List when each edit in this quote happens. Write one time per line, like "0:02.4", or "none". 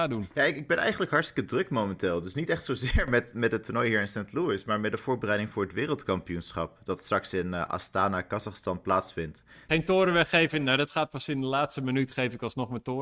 0:09.7